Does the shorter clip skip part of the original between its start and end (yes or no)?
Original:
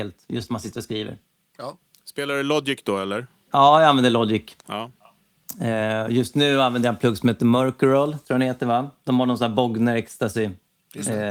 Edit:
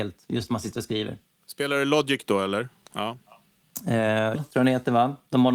yes